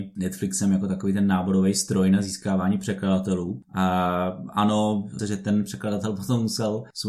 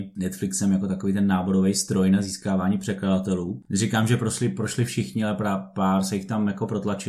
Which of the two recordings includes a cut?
first; 2 cuts; at 3.6 s, 5.2 s

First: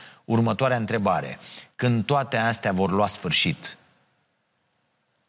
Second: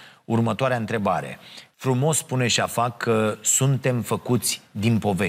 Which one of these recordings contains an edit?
second; 1 cut; at 1.7 s

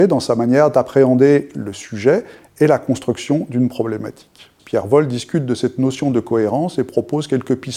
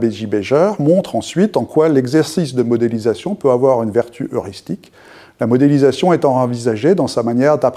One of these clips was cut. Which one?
first; 1 cut; at 4.6 s

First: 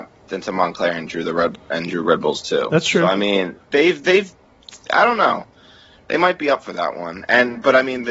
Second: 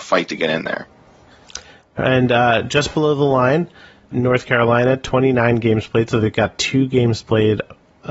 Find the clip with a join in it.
second; 2 cuts; at 2.0 s, 4.1 s

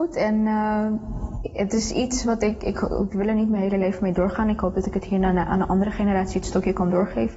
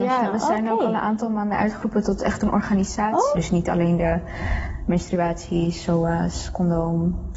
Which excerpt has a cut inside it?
second; 1 cut; at 3.3 s

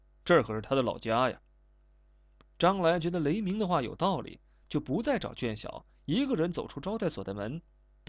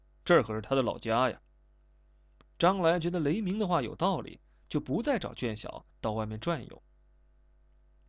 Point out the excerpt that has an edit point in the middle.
second; 1 cut; at 5.9 s

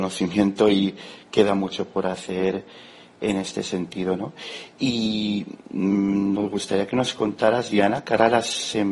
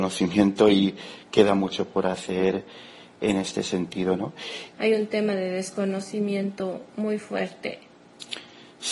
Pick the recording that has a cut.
second; 1 cut; at 4.7 s

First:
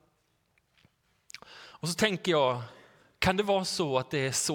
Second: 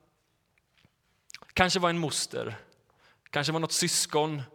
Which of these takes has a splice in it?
second; 1 cut; at 1.5 s

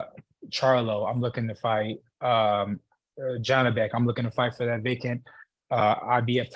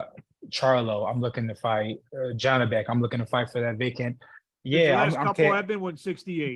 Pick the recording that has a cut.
second; 2 cuts; at 2.1 s, 4.6 s

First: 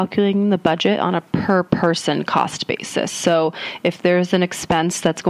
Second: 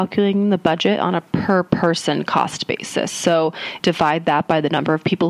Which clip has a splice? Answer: second; 1 cut; at 3.8 s

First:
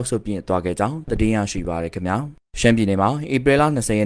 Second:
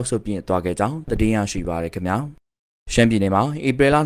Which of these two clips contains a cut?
first; 1 cut; at 2.5 s

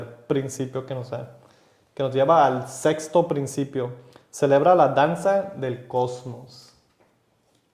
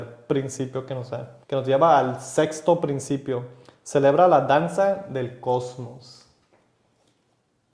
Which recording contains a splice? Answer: second; 1 cut; at 1.4 s

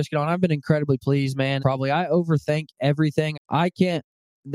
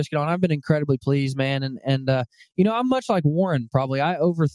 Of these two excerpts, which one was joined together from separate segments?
first; 2 cuts; at 1.6 s, 3.3 s

